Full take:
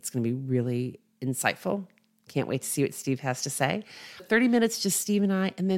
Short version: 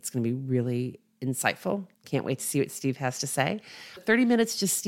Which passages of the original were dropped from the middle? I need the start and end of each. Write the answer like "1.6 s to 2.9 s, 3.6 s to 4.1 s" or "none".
1.9 s to 2.2 s